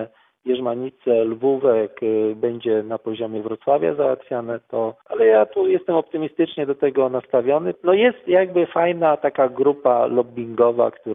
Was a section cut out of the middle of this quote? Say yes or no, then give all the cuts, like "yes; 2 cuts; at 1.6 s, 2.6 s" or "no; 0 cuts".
yes; 2 cuts; at 5.0 s, 7.7 s